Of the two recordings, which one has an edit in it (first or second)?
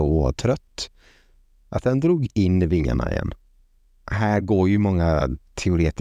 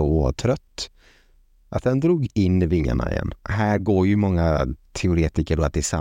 second